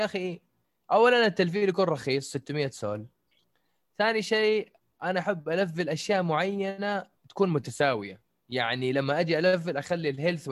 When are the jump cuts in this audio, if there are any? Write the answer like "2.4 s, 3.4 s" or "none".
7.2 s